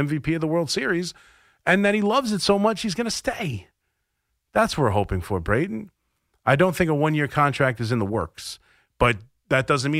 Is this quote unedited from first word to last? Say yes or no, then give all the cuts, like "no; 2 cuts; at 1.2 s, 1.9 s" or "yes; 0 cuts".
yes; 0 cuts